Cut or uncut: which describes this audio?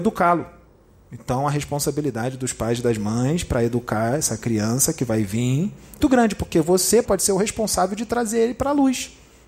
cut